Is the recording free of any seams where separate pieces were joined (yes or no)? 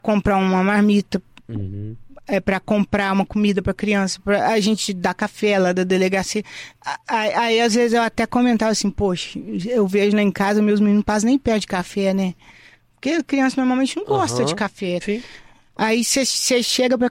no